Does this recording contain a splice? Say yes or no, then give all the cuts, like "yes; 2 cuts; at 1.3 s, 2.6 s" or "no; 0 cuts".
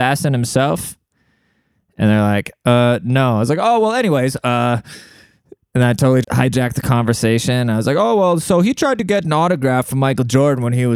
yes; 1 cut; at 6.2 s